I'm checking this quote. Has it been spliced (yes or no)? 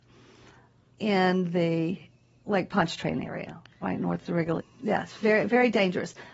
yes